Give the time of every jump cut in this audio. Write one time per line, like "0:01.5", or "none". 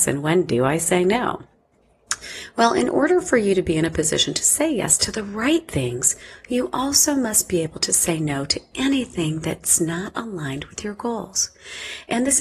none